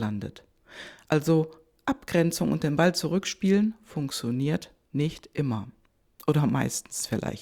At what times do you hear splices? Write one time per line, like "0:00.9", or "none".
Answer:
none